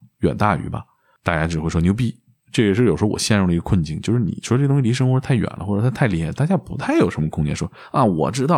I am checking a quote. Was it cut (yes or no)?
no